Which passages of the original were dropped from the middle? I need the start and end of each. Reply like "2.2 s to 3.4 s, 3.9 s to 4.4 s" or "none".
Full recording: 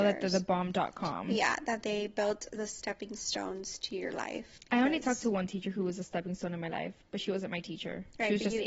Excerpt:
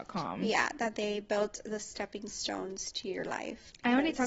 none